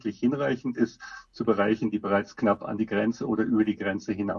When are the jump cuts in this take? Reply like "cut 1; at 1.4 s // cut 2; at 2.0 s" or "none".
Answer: none